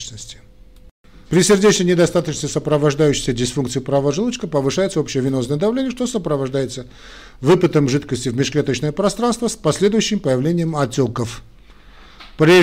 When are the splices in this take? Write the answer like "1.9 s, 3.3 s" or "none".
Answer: 1.2 s